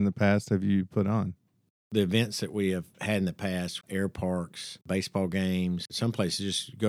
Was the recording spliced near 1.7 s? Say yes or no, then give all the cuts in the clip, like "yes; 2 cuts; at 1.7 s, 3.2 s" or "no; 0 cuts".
no; 1 cut; at 3.8 s